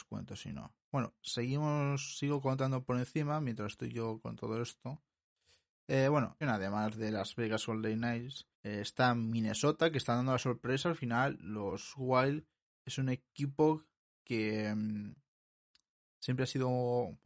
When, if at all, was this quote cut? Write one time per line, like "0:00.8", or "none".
0:06.4
0:08.5

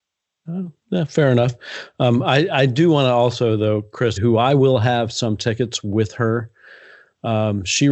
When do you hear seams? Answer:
0:04.2

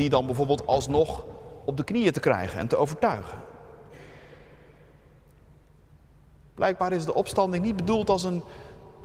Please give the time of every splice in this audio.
none

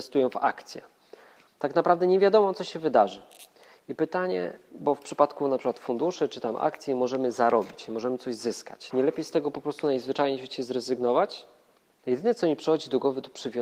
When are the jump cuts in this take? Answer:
0:08.9

